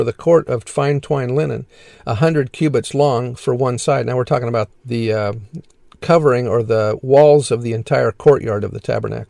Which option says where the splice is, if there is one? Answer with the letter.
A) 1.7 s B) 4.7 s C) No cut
B